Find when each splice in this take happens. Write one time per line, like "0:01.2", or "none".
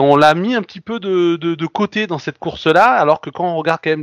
none